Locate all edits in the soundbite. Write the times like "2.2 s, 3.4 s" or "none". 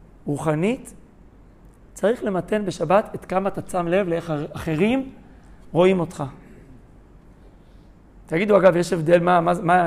none